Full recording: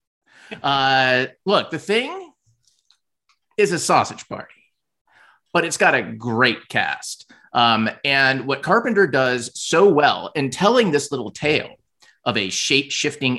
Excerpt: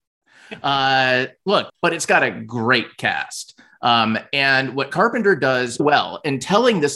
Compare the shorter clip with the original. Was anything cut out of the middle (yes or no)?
yes